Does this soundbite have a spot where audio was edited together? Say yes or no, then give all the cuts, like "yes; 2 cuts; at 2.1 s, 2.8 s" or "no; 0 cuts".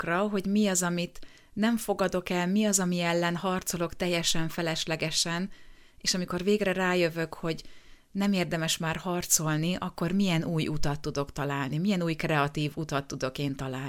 no; 0 cuts